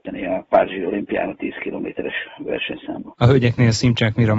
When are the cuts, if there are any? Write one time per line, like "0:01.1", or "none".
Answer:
none